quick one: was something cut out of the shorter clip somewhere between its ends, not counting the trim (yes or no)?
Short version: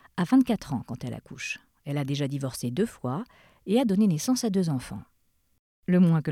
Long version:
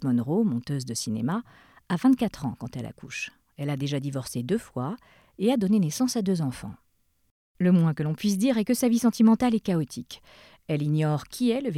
no